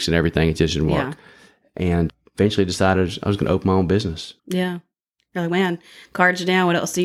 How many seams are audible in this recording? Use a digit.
1